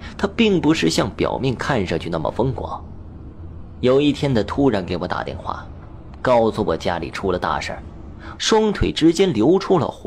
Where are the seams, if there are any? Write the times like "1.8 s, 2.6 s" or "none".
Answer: 8.4 s